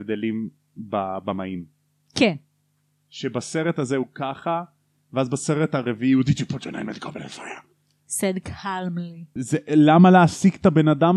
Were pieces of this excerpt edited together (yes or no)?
yes